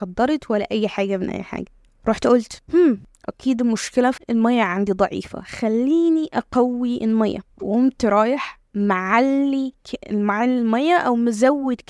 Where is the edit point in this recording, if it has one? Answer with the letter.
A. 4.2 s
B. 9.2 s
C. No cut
A